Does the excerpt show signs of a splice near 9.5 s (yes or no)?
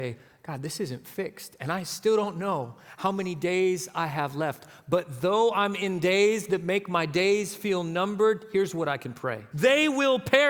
yes